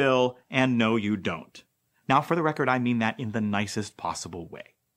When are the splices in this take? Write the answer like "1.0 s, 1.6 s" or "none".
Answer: none

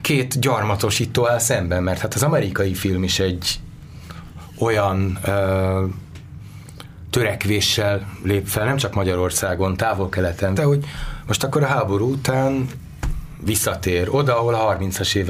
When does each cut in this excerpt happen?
10.6 s

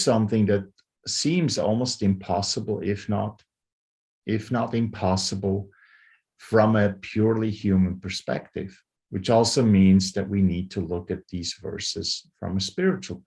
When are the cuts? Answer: none

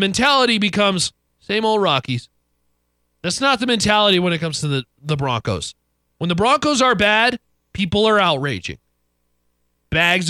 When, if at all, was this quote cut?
1.2 s

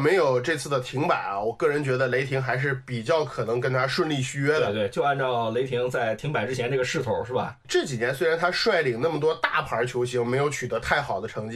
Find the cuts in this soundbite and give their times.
none

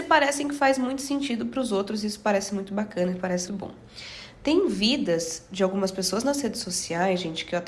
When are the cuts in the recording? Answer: 3.5 s

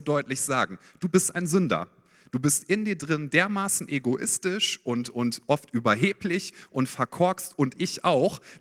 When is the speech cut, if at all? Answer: none

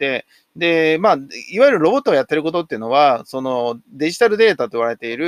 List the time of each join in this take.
none

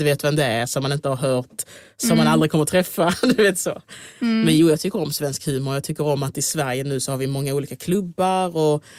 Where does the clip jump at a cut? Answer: none

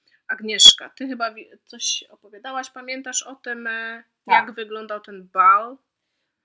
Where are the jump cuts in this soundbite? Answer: none

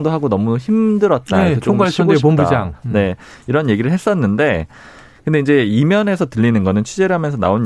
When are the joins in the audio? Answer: none

